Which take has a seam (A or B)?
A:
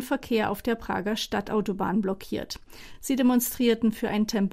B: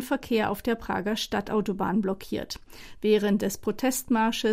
B